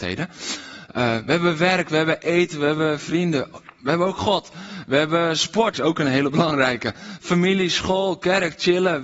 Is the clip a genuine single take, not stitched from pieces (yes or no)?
no